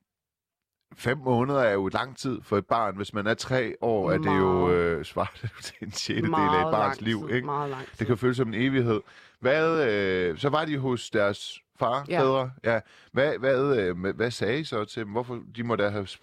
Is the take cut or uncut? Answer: uncut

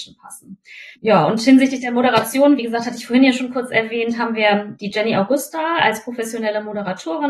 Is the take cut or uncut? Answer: uncut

